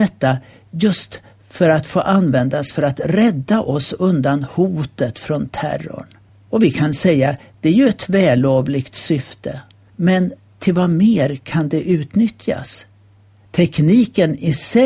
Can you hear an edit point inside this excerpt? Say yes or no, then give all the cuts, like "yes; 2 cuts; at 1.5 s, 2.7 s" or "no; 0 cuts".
no; 0 cuts